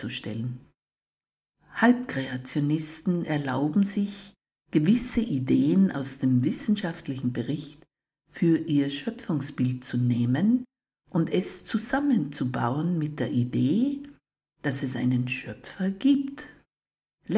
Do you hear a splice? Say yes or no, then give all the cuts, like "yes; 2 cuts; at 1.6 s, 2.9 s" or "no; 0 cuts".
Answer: no; 0 cuts